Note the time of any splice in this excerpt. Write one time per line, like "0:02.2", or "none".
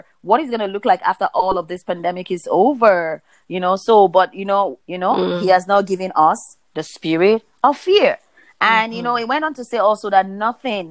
0:04.8